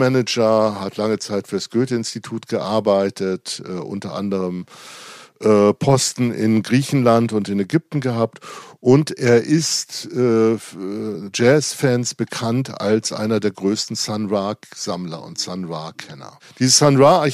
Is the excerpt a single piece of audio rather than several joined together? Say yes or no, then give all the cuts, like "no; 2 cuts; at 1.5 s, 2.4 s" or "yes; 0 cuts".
yes; 0 cuts